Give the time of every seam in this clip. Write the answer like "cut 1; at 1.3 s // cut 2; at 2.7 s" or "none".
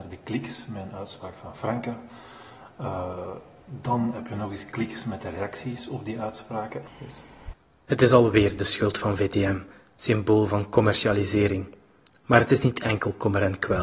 cut 1; at 6.9 s